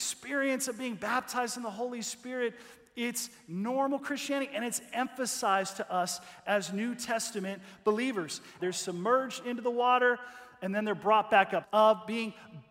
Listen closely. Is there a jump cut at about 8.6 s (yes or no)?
yes